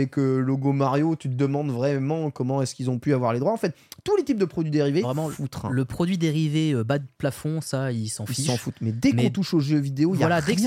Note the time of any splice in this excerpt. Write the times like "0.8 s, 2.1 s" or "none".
5.0 s

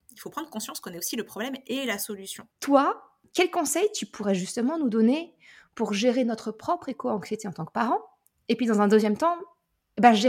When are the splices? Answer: 2.5 s

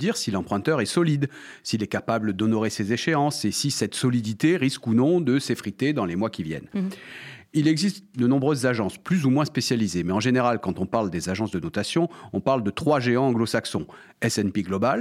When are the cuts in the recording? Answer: none

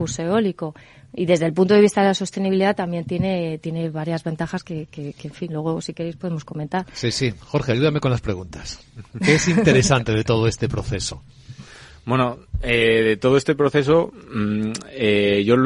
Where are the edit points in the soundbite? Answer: none

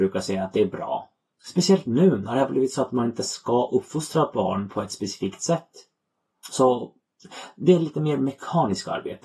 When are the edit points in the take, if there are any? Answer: 1.3 s, 6.4 s

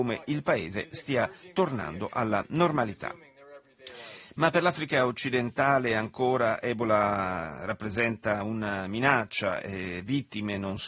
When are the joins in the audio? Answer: none

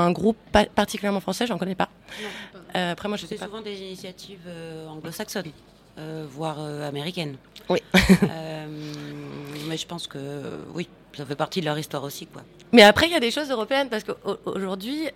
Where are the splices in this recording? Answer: none

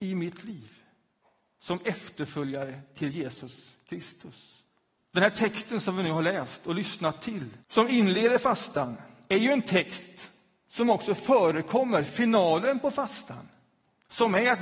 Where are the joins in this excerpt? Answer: 5.0 s, 7.6 s

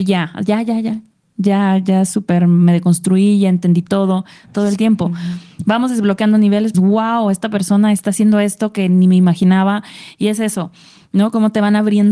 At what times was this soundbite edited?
6.7 s

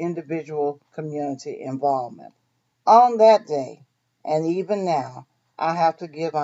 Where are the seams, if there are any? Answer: 2.7 s

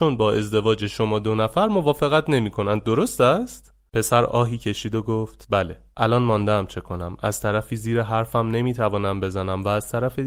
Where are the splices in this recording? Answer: none

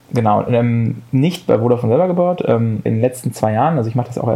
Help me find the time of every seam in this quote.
2.9 s

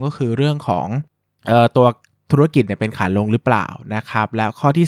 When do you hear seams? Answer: none

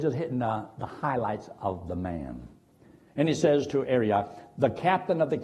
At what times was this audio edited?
3.1 s

